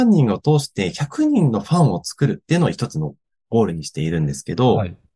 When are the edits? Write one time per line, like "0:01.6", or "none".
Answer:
none